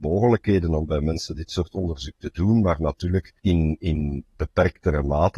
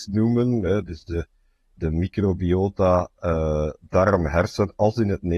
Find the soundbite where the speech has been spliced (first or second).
first